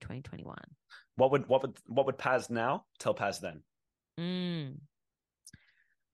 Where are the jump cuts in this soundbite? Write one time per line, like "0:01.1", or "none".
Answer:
0:01.1